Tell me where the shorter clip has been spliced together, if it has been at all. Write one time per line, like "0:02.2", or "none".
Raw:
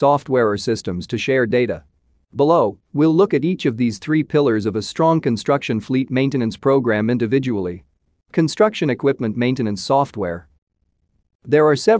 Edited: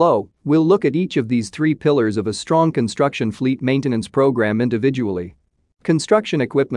none